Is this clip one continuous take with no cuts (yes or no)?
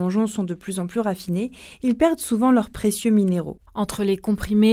no